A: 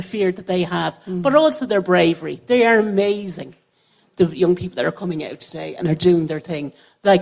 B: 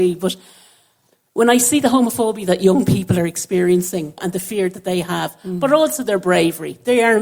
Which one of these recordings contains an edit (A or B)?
B